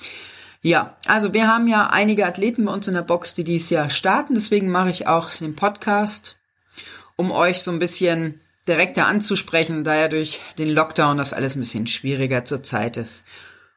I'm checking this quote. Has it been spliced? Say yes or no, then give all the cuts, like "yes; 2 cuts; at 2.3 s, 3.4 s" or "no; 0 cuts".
no; 0 cuts